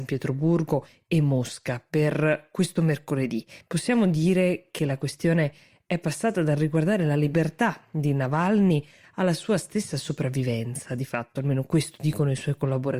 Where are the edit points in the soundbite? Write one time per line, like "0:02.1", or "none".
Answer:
0:03.6